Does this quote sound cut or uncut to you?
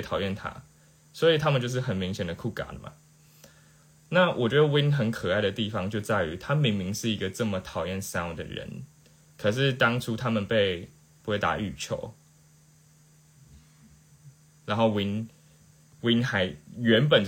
cut